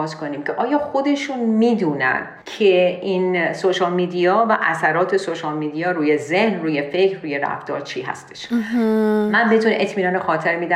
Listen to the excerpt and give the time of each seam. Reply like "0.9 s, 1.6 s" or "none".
2.4 s

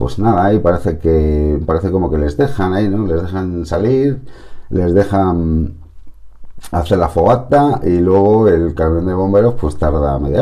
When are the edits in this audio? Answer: none

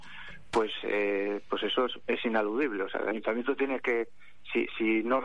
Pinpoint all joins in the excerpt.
2.0 s

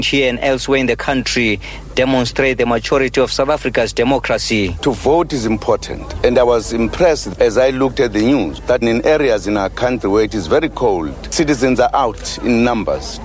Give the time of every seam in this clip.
8.8 s

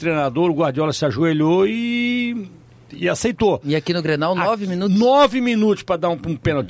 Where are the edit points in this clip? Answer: none

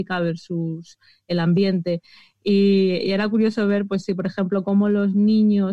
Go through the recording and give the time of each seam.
none

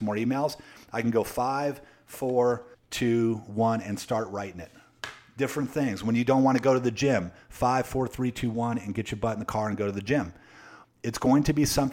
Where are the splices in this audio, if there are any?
2.7 s, 10.8 s

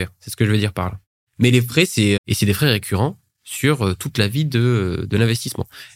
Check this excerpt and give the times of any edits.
2.2 s

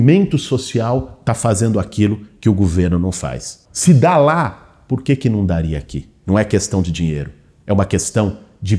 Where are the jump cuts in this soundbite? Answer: 3.7 s

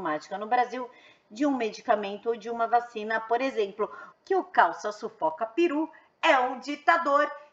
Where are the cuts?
4.1 s

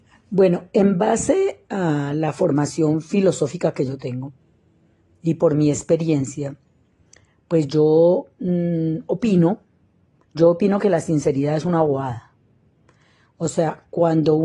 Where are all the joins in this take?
10.2 s

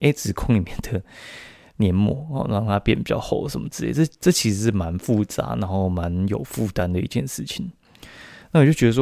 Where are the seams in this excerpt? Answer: none

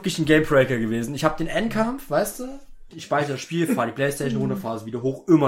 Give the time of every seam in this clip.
2.9 s

